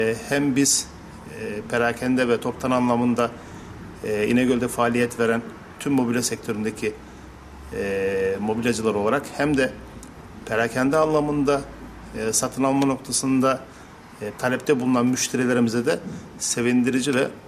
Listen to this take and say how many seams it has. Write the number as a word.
one